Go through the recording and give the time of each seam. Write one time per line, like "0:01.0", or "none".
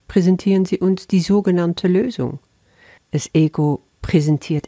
0:03.0